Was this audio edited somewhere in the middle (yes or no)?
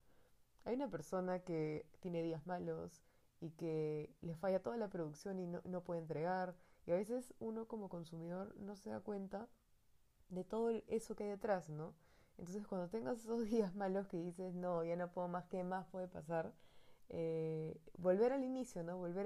no